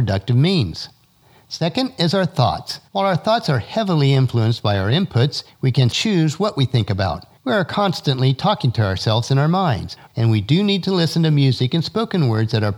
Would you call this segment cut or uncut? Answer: cut